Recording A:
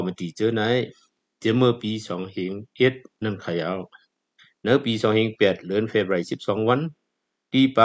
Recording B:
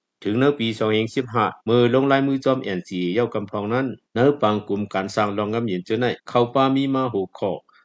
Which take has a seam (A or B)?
B